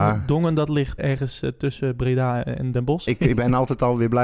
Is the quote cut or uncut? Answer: cut